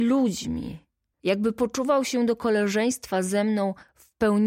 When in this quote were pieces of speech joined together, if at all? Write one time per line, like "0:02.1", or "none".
0:01.1